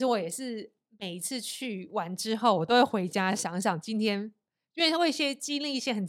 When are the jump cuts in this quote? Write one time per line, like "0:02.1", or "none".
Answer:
none